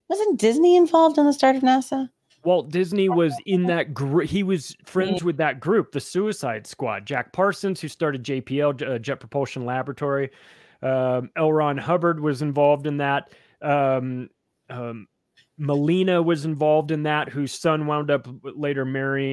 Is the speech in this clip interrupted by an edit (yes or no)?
no